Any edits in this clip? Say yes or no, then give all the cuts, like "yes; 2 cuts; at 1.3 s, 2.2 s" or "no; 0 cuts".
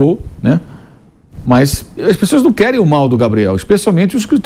yes; 1 cut; at 2.0 s